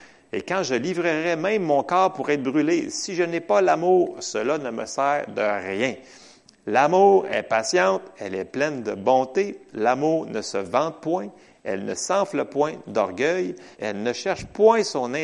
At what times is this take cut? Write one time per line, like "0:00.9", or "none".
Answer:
0:09.7
0:13.7